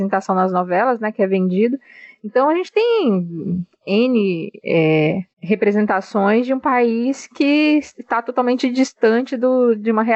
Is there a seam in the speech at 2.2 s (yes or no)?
no